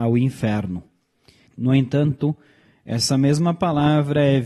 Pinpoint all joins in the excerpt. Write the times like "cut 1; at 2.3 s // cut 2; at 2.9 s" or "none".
cut 1; at 1.5 s